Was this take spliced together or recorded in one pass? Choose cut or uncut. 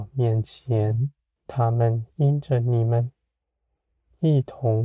cut